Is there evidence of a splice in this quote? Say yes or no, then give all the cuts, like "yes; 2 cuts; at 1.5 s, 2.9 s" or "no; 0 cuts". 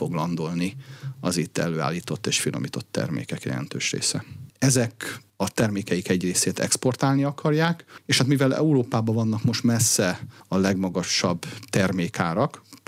yes; 1 cut; at 4.5 s